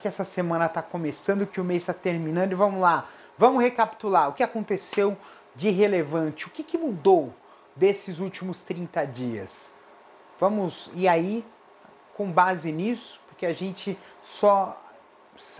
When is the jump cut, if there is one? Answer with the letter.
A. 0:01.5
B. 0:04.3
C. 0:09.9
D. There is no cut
B